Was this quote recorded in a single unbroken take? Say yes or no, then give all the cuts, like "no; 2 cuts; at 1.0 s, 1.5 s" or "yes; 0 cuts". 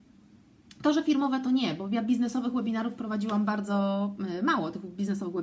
yes; 0 cuts